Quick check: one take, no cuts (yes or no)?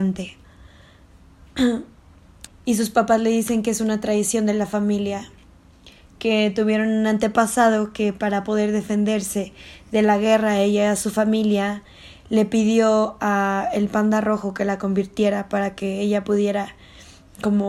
no